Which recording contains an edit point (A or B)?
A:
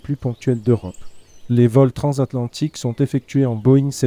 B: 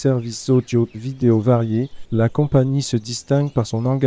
B